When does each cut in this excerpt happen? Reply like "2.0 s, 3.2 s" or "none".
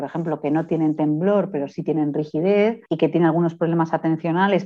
2.9 s